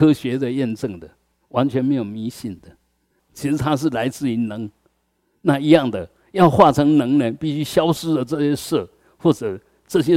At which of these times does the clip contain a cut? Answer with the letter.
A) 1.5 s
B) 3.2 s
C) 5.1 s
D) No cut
B